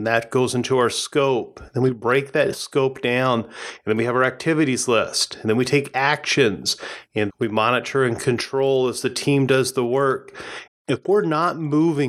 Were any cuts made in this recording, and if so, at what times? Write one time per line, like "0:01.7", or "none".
0:07.3
0:10.7